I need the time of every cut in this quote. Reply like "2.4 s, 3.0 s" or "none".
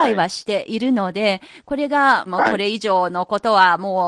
2.3 s